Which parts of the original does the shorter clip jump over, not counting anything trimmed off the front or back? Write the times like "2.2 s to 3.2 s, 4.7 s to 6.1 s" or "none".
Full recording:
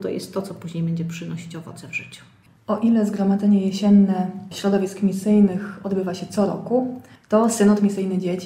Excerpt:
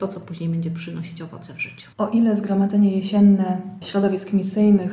2.3 s to 2.6 s